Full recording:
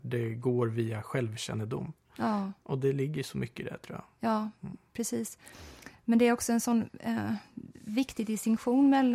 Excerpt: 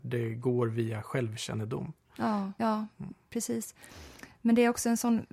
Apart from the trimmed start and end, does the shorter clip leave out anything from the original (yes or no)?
yes